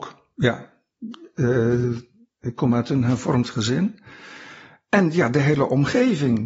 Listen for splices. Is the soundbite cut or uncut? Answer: uncut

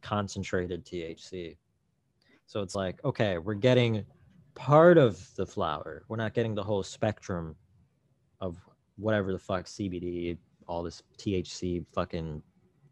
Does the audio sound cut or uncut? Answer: uncut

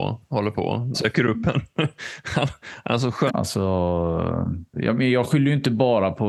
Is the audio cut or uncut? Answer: cut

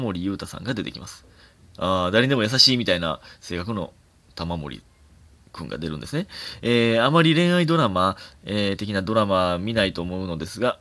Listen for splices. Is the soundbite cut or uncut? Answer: uncut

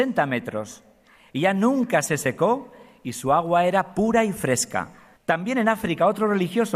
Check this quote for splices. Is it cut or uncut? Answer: cut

